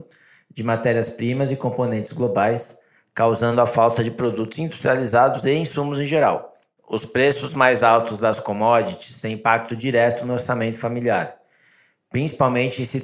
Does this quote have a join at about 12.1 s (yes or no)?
no